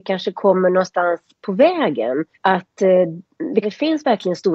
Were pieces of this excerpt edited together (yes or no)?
yes